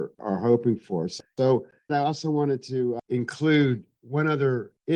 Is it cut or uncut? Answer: cut